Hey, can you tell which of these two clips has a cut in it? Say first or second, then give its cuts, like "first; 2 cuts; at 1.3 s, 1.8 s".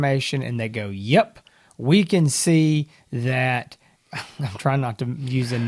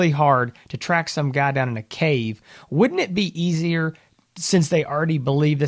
first; 1 cut; at 4.0 s